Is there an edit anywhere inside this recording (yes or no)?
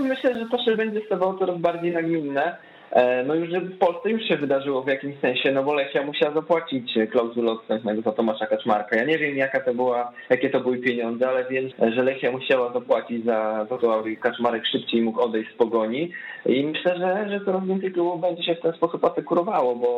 yes